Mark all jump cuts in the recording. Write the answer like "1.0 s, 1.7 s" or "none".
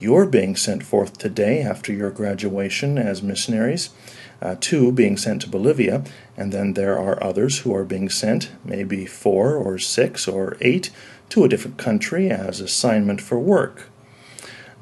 none